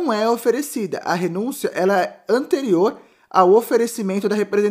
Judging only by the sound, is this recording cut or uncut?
uncut